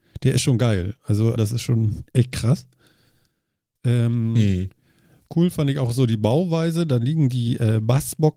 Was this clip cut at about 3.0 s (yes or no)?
no